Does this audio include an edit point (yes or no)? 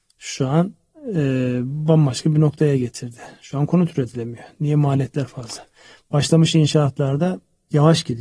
no